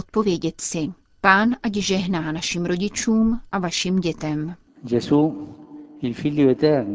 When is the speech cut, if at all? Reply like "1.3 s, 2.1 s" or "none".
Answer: 1.1 s